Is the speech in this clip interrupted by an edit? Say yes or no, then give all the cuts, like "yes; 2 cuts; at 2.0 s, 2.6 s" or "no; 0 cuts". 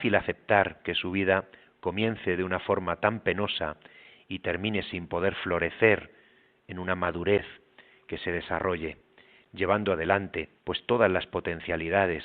yes; 1 cut; at 10.6 s